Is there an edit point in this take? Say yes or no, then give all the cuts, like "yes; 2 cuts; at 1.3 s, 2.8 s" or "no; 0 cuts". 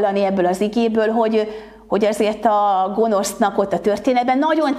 no; 0 cuts